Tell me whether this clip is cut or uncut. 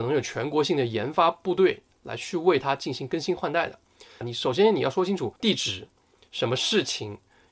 cut